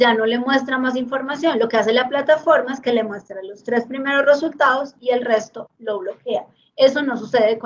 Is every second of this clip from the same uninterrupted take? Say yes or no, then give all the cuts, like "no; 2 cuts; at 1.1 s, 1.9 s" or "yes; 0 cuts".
yes; 0 cuts